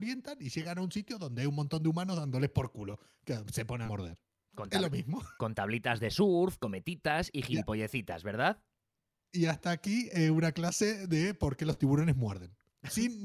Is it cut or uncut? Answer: uncut